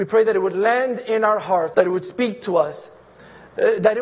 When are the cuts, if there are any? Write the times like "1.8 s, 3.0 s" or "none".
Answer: 1.7 s